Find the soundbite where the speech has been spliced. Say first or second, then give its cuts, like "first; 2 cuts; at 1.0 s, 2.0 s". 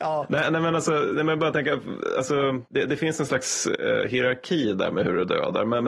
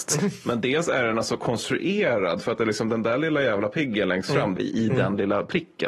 second; 1 cut; at 4.6 s